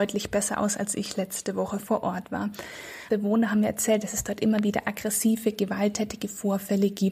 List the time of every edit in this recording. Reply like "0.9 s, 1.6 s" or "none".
3.1 s